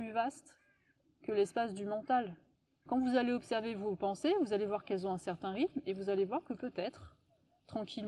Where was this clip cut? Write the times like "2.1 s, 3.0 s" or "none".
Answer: 2.9 s